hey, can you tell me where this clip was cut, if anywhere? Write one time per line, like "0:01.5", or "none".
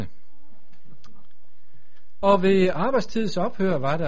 none